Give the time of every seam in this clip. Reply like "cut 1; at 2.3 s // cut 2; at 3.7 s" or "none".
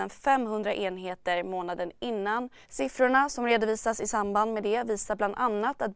cut 1; at 2.6 s